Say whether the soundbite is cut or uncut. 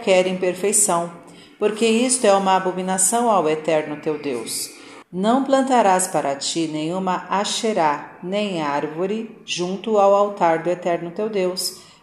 cut